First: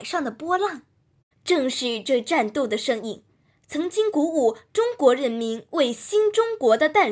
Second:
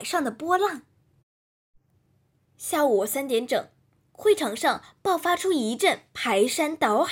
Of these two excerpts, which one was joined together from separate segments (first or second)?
first